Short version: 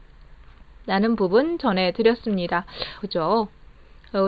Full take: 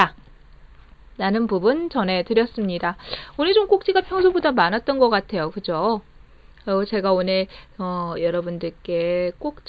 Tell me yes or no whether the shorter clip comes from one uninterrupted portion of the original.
no